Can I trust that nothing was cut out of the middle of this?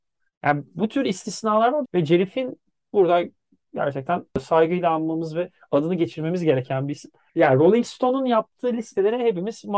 no; 2 cuts; at 1.9 s, 7.3 s

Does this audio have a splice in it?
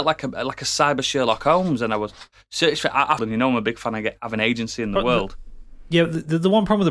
yes; 1 cut; at 3.2 s

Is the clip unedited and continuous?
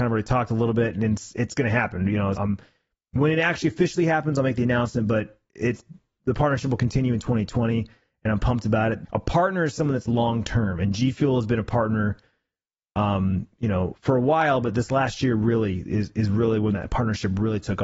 no; 2 cuts; at 2.4 s, 9.0 s

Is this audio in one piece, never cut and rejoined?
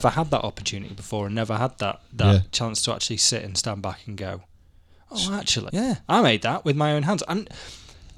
no; 1 cut; at 5.7 s

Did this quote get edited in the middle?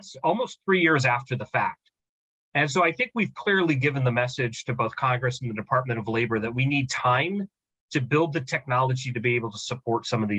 no; 0 cuts

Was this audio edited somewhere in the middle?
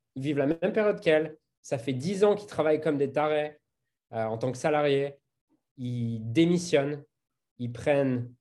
no; 0 cuts

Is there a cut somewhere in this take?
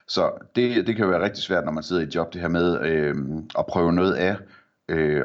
no; 0 cuts

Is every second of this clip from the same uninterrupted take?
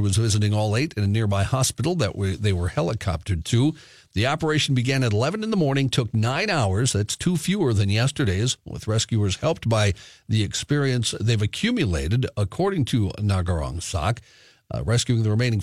yes; 0 cuts

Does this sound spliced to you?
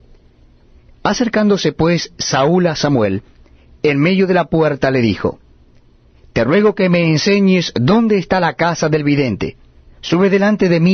yes; 1 cut; at 9.9 s

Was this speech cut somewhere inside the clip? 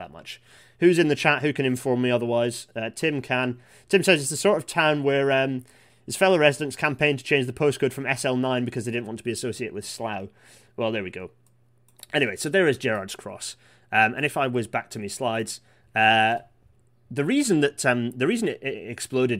no; 0 cuts

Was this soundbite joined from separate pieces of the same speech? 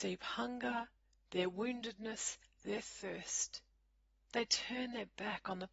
no; 0 cuts

